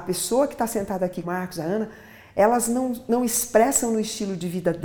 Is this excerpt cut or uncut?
cut